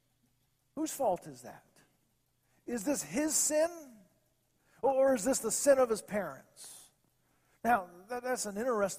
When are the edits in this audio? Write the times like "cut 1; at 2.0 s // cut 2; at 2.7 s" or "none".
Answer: none